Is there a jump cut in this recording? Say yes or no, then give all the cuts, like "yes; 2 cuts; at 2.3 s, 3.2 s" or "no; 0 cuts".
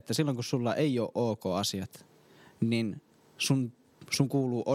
no; 0 cuts